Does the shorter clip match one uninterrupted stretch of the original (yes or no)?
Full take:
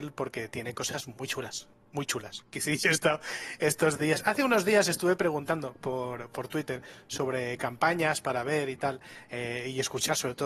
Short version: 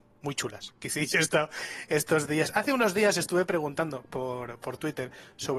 yes